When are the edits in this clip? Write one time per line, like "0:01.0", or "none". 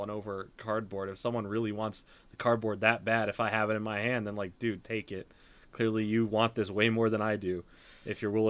0:04.8